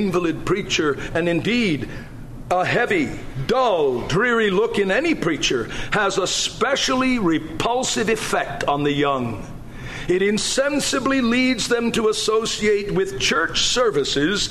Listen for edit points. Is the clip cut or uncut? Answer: uncut